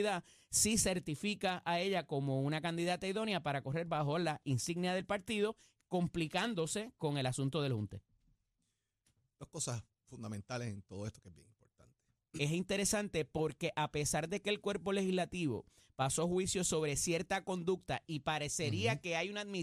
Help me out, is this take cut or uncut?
cut